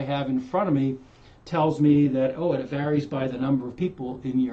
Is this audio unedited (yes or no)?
yes